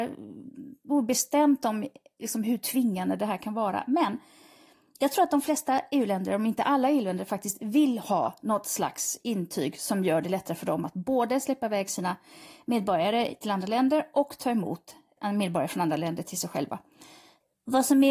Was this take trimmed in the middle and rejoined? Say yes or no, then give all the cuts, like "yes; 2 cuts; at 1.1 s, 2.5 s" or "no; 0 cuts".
no; 0 cuts